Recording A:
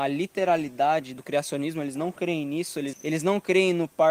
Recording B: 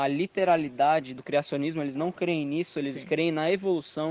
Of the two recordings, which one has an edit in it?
A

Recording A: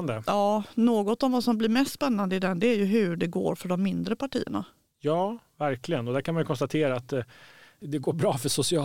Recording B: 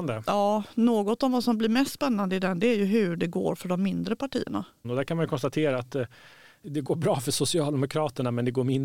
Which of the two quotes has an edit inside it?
B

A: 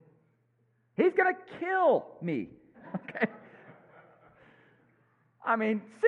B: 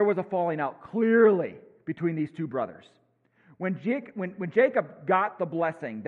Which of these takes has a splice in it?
A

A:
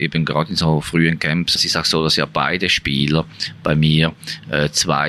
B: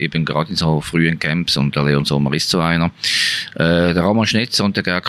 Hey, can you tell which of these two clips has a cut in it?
A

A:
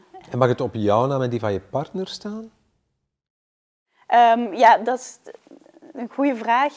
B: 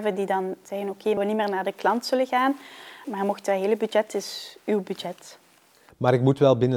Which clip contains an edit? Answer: B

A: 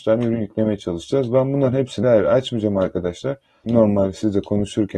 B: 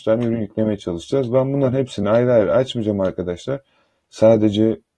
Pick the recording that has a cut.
A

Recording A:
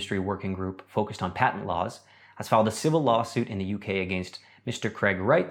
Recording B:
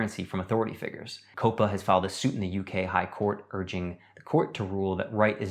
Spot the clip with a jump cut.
B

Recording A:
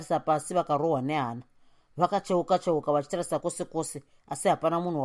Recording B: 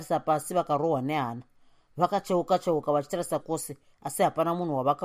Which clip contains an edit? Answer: B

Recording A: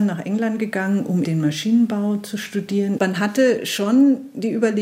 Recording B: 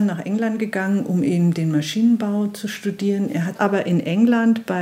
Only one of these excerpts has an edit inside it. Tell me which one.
A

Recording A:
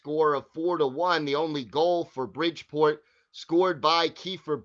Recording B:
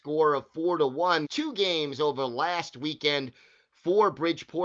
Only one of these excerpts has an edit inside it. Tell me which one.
B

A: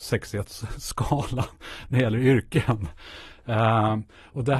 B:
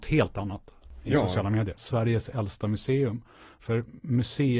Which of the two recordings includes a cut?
B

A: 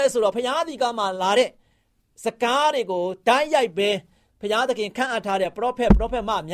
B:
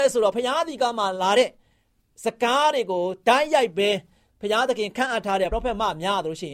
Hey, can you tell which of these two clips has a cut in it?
B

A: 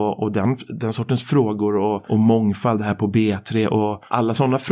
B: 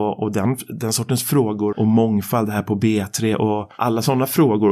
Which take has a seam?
B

